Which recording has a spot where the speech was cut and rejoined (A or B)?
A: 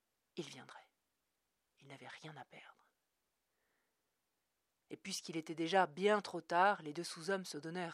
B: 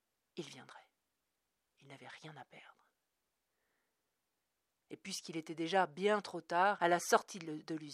B